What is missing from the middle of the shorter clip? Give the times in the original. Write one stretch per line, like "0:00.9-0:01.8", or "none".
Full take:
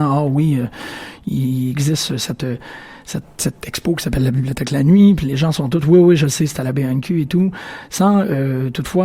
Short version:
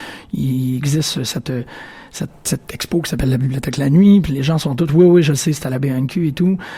none